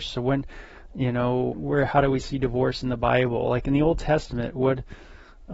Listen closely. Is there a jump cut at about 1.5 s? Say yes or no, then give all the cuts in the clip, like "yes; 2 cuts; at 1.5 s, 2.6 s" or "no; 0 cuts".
yes; 1 cut; at 1.5 s